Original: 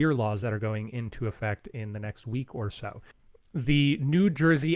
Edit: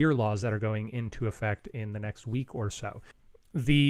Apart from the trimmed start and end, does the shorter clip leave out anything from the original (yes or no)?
no